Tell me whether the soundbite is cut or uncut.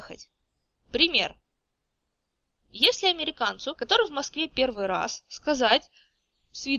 uncut